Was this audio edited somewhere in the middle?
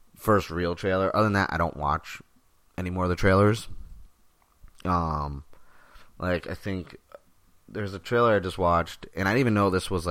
no; 0 cuts

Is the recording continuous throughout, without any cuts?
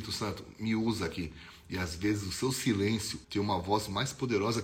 no; 1 cut; at 3.2 s

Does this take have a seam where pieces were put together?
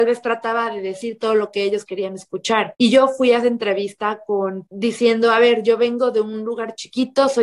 no; 0 cuts

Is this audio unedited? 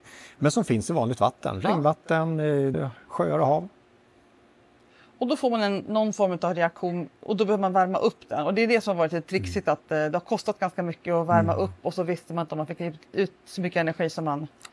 no; 1 cut; at 2.7 s

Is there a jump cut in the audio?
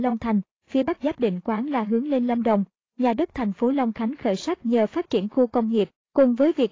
no; 0 cuts

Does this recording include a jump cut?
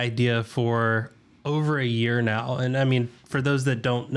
no; 0 cuts

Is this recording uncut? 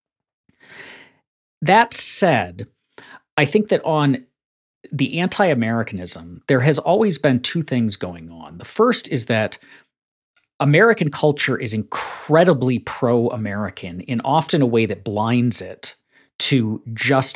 yes; 0 cuts

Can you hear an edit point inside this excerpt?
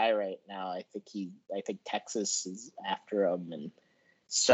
no; 0 cuts

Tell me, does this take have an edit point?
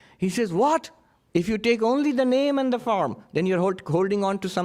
yes; 1 cut; at 1.3 s

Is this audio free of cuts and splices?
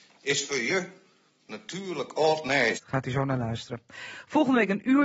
no; 1 cut; at 2.7 s

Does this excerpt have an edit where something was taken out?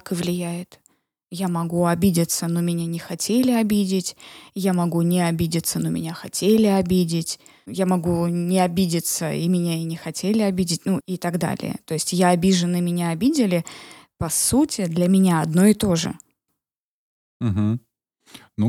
yes; 1 cut; at 11.0 s

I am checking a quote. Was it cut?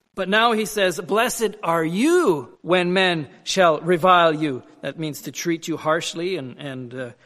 yes; 1 cut; at 2.5 s

